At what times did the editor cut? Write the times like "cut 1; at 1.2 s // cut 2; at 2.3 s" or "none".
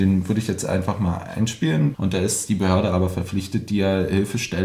cut 1; at 1.9 s